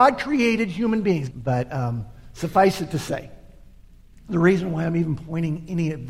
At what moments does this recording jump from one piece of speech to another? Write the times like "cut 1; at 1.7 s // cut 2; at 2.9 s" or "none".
cut 1; at 1.3 s